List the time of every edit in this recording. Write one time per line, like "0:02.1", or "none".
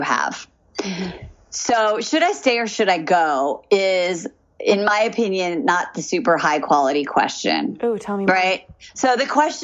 none